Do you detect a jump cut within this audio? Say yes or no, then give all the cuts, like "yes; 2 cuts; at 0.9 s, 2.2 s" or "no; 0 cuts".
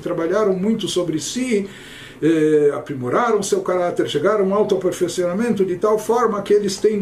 no; 0 cuts